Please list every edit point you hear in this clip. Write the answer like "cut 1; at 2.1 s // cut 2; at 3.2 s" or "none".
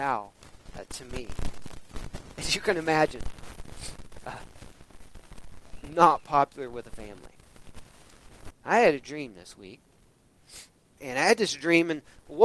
cut 1; at 8.5 s // cut 2; at 11.0 s